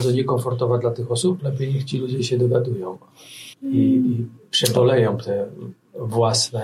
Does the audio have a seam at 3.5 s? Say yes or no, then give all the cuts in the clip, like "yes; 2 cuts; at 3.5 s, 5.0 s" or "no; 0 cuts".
yes; 2 cuts; at 1.4 s, 3.5 s